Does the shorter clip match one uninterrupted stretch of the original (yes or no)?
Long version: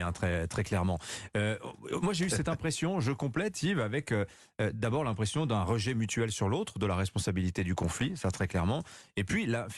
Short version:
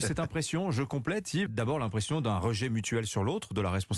no